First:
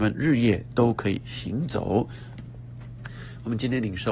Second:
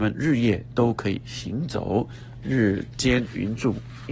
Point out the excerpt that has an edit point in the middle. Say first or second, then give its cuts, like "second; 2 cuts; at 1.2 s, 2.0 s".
first; 1 cut; at 2.4 s